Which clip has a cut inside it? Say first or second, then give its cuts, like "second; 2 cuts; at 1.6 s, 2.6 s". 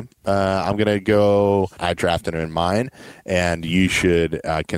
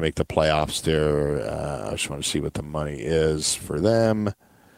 first; 1 cut; at 1.8 s